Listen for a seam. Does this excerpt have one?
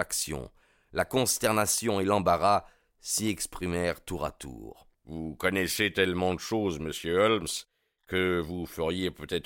yes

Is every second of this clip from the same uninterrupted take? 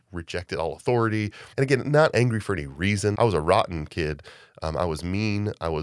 no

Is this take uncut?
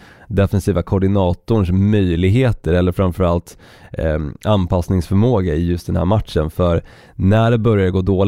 yes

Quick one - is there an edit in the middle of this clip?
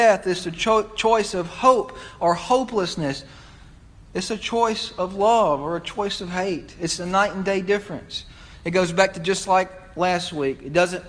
yes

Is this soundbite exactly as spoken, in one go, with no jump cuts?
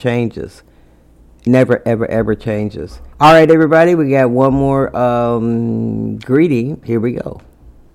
no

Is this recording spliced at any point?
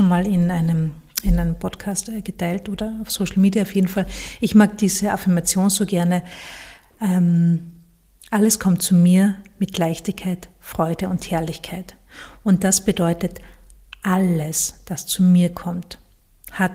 no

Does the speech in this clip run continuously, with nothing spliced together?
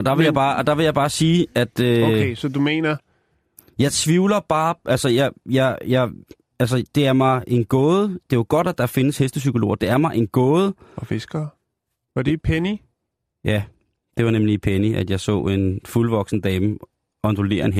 no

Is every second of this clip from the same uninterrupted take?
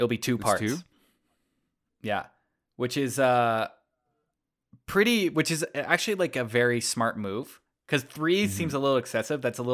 yes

